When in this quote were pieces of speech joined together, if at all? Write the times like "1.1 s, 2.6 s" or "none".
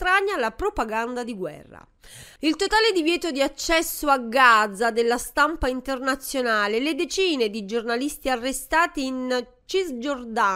2.4 s